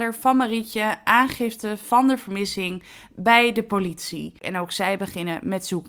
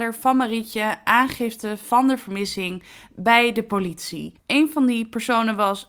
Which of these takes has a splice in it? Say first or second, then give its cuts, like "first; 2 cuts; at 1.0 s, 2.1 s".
second; 1 cut; at 4.4 s